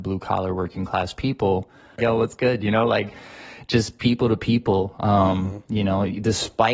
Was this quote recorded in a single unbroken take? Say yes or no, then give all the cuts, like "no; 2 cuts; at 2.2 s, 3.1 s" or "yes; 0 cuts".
no; 1 cut; at 2.0 s